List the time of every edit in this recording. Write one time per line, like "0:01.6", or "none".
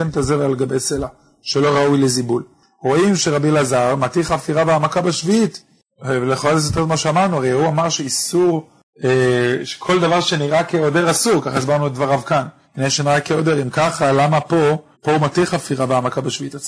0:12.6
0:14.9